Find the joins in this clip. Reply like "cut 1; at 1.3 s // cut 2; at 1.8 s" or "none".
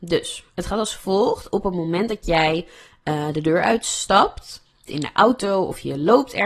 cut 1; at 4.9 s